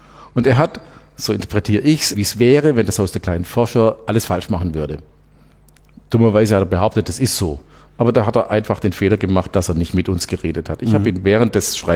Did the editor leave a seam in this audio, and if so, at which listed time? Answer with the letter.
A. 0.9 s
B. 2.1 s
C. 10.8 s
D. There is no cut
B